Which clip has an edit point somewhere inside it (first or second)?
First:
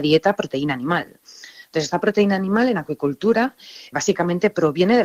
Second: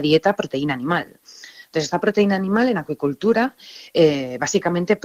first